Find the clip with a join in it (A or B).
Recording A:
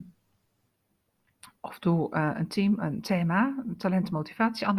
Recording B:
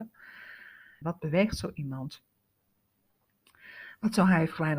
B